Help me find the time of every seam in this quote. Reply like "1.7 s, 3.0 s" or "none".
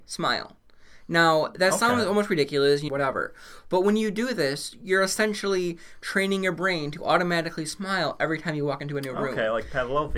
2.9 s